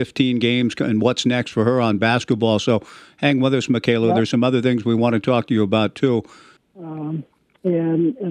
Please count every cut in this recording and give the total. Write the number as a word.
one